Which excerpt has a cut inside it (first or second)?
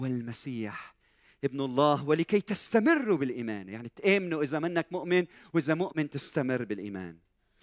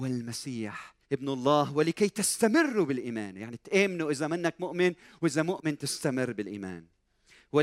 second